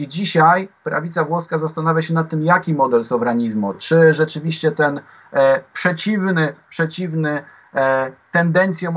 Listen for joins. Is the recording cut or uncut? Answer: uncut